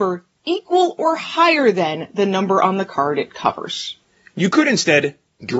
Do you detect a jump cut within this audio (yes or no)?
no